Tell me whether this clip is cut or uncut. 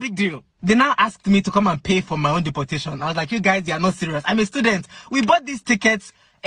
uncut